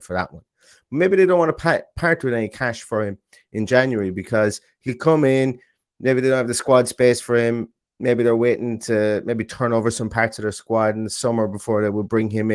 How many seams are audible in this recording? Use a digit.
0